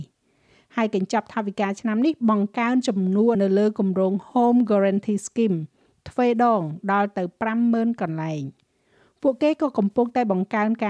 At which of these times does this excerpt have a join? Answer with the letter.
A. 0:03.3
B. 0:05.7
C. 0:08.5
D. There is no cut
A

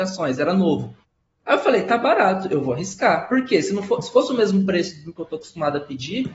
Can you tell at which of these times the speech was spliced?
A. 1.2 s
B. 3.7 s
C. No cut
C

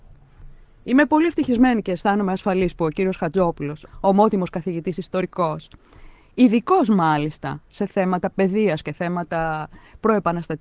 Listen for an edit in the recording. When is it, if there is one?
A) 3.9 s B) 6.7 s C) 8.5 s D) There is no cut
A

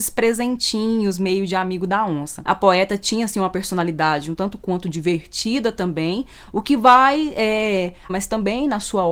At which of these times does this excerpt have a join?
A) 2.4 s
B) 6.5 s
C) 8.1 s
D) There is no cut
C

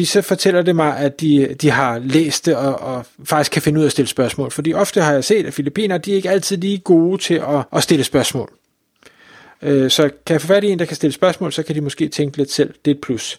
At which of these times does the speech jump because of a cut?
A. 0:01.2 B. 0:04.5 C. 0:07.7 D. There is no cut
C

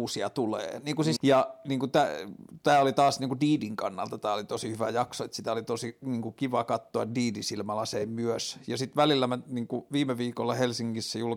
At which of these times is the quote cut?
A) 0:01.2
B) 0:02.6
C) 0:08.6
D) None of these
A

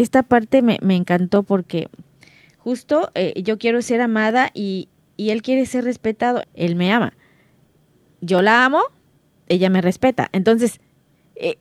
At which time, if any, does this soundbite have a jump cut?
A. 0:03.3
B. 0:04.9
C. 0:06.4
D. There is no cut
C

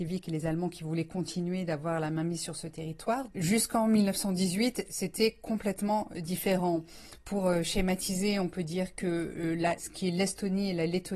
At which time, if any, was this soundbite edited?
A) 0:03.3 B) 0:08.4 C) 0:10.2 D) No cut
A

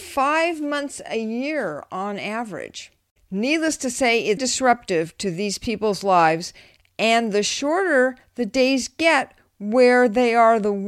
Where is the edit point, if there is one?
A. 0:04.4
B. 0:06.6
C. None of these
A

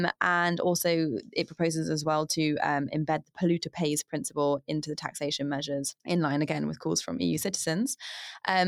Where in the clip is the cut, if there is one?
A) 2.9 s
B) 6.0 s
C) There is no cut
B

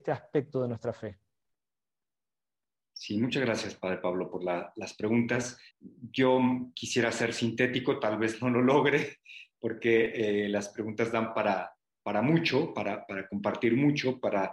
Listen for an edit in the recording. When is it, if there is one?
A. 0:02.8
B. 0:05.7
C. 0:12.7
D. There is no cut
B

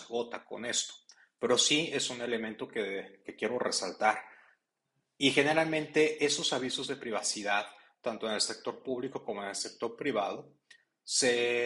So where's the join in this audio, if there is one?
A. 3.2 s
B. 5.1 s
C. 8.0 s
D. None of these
A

